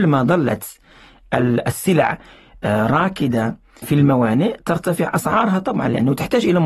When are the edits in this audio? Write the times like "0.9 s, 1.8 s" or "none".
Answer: 3.8 s